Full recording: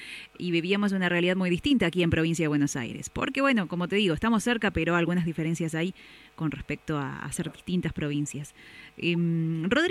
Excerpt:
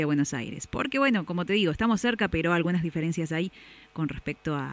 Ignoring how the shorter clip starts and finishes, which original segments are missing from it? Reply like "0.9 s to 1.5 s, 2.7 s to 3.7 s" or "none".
none